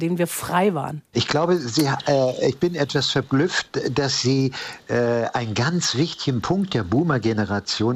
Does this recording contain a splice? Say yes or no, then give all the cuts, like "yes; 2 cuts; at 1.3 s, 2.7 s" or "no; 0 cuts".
yes; 1 cut; at 1.1 s